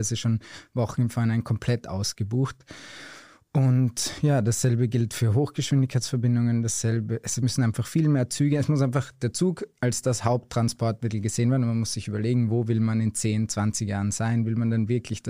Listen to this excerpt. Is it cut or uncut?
uncut